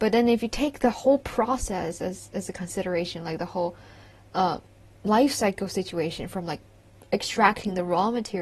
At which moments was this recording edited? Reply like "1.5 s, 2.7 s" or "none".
none